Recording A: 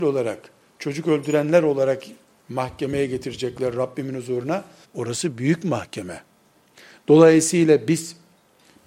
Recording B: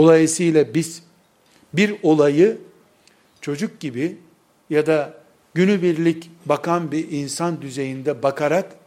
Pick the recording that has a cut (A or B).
A